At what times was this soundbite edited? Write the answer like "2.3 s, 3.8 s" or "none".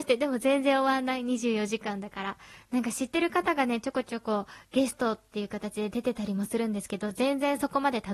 none